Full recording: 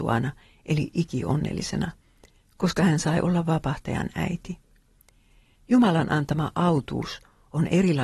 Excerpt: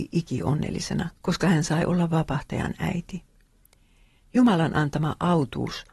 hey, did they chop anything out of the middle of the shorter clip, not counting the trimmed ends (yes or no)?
yes